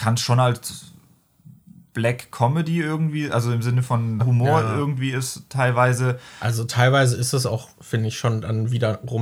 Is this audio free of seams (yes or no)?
no